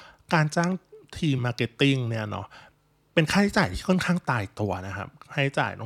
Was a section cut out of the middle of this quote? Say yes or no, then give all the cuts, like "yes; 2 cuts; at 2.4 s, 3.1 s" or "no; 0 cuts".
yes; 1 cut; at 1.4 s